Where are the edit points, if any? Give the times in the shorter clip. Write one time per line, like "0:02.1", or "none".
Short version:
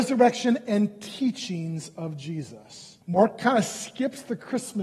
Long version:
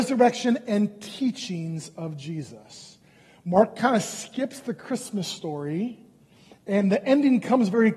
0:03.0